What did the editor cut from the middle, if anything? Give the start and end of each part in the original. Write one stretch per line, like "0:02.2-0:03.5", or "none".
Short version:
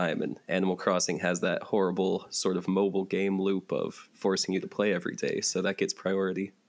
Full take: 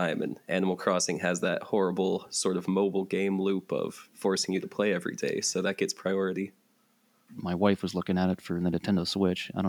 none